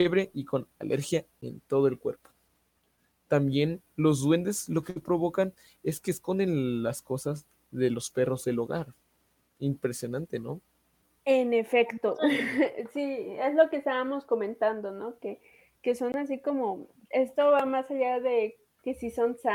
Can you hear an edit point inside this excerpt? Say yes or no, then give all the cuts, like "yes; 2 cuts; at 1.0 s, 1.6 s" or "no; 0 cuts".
no; 0 cuts